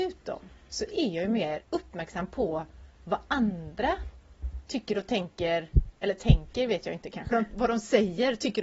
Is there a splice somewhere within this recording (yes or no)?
yes